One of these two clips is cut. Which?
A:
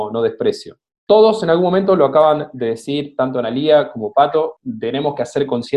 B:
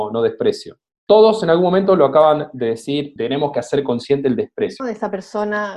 B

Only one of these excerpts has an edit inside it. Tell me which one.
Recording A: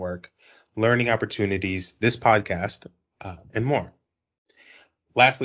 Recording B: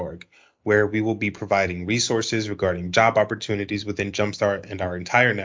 A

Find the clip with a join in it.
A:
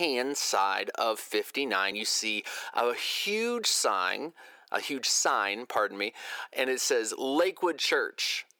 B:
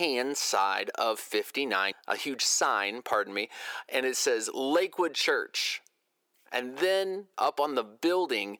B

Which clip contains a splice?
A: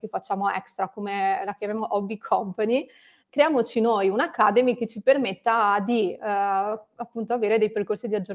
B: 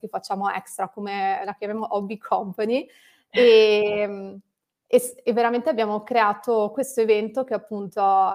A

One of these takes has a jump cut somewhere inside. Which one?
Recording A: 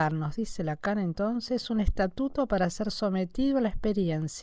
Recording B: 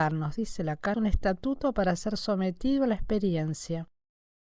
B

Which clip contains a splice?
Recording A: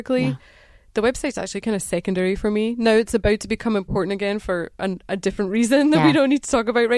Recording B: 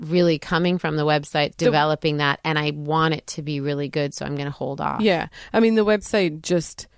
B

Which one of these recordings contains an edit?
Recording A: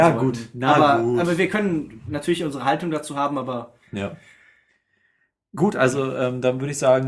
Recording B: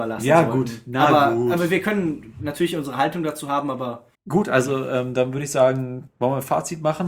B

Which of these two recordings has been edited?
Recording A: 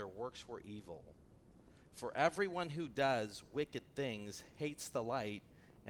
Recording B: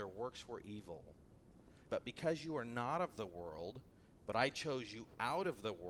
B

